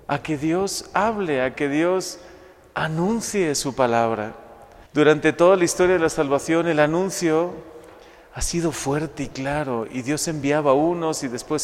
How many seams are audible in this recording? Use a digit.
1